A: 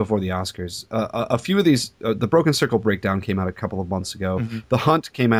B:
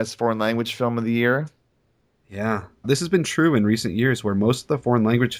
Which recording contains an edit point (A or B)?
B